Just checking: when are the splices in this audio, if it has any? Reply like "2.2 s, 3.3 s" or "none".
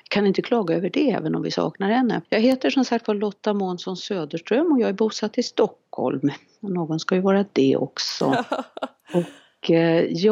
2.2 s